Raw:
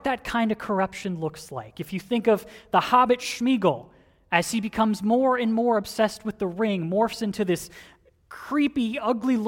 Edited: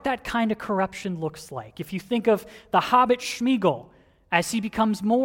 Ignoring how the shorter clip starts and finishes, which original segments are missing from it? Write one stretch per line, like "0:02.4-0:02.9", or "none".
none